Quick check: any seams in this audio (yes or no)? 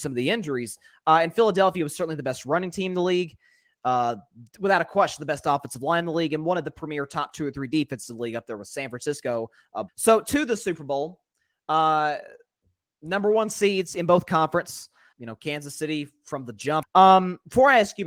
yes